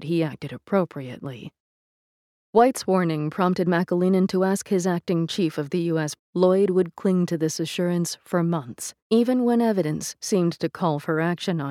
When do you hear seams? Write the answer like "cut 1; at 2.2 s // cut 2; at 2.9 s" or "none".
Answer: cut 1; at 6.2 s // cut 2; at 9.0 s

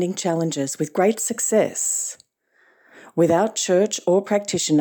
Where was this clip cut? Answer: none

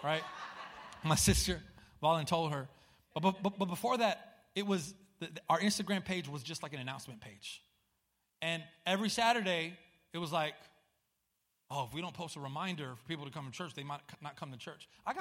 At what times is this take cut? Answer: none

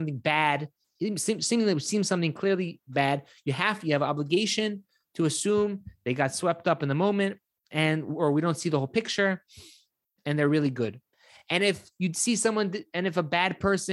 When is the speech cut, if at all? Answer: none

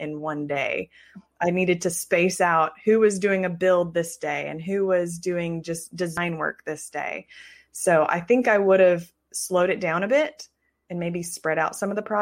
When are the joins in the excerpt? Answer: none

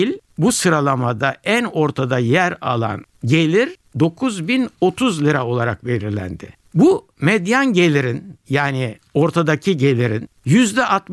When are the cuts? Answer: none

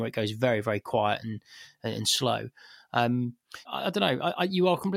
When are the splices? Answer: cut 1; at 3.6 s

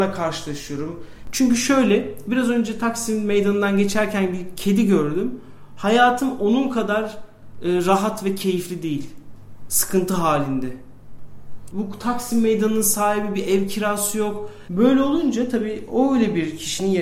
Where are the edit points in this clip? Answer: cut 1; at 1.2 s // cut 2; at 11.7 s // cut 3; at 14.7 s

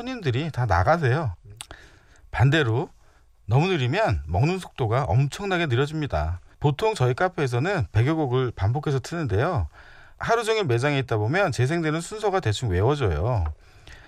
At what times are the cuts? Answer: cut 1; at 6.5 s

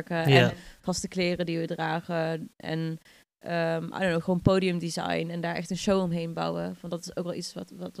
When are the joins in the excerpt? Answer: none

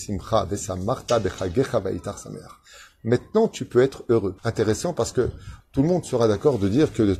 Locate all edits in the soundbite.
cut 1; at 4.4 s // cut 2; at 5.6 s

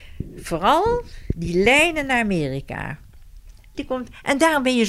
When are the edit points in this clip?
cut 1; at 3.7 s

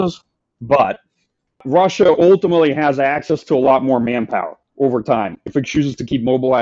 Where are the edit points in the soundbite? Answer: none

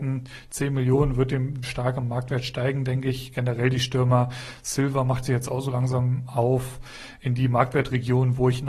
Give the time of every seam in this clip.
cut 1; at 1.6 s

